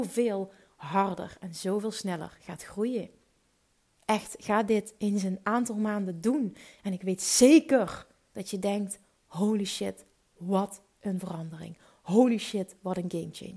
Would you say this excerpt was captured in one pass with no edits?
yes; 0 cuts

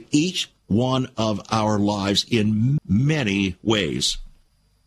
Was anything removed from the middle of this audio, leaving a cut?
yes; 1 cut; at 2.8 s

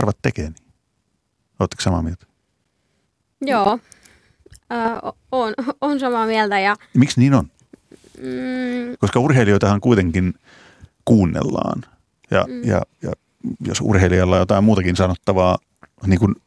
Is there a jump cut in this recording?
no; 0 cuts

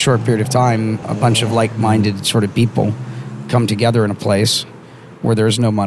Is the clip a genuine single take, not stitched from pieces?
no; 1 cut; at 1.0 s

